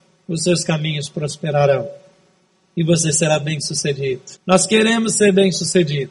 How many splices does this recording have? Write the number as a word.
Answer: one